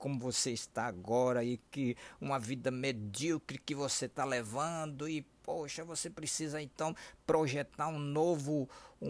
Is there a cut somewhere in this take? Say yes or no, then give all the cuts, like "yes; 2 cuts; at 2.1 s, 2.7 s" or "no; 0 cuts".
no; 0 cuts